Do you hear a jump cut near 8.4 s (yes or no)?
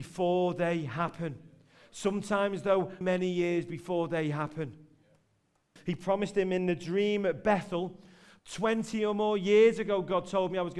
yes